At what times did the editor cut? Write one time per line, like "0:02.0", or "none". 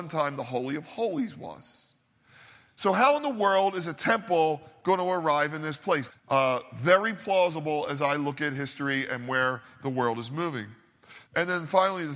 0:06.1
0:11.3